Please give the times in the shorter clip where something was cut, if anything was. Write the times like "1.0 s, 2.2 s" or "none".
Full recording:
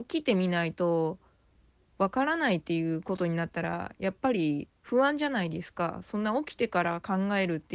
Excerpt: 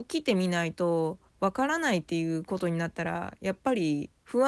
1.3 s